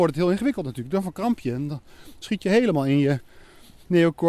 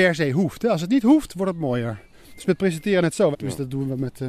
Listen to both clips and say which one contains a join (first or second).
second